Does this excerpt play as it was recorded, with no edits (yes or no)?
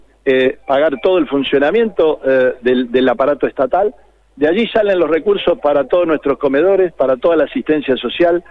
yes